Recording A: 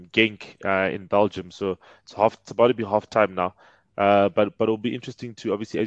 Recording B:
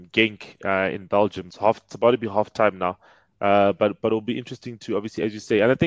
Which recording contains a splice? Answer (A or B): B